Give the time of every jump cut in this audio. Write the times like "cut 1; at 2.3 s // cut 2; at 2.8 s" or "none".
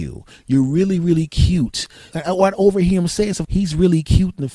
cut 1; at 2.1 s // cut 2; at 3.4 s